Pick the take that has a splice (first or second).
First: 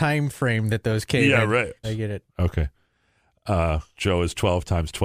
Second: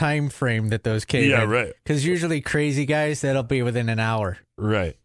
first